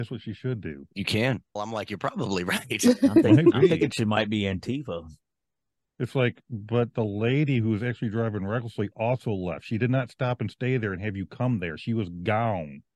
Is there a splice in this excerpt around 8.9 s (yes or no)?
no